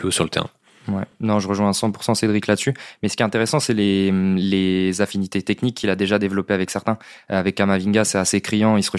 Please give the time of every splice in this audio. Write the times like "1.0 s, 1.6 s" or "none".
none

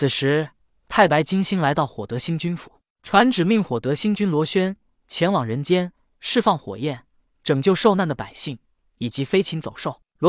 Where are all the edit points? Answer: none

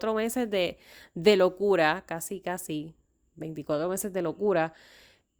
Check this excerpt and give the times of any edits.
none

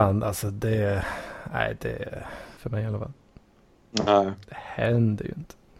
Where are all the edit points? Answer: 2.6 s

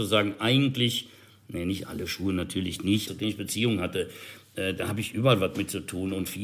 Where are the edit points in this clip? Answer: 3.1 s

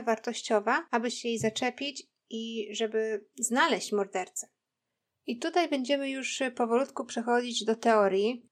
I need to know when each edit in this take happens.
none

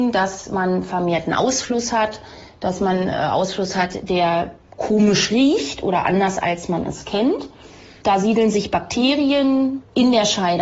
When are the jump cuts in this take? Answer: 8.0 s

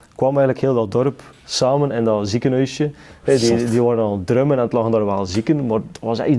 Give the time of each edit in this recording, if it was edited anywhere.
none

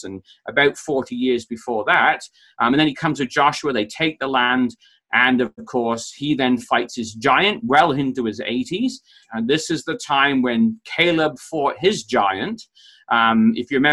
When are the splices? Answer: 9.2 s

